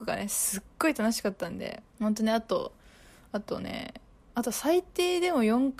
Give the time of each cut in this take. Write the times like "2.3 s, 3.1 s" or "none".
1.9 s